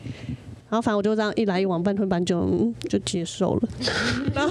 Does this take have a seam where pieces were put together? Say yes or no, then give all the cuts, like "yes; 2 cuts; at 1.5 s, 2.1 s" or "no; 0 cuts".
no; 0 cuts